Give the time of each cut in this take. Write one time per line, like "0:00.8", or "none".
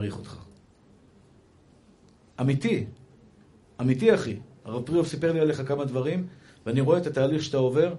none

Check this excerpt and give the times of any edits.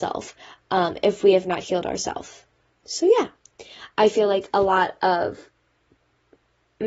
none

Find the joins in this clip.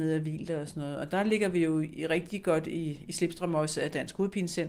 none

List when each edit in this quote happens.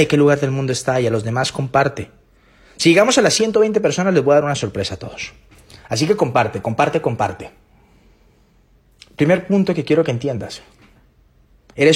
none

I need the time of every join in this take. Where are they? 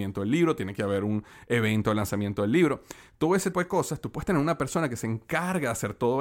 0:03.5

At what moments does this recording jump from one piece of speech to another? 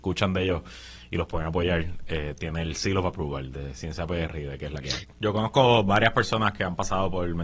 0:05.1

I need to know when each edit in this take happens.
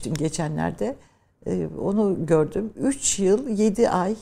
none

